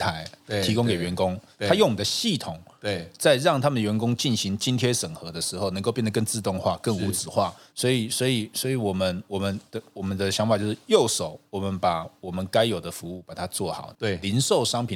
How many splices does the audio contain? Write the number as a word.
two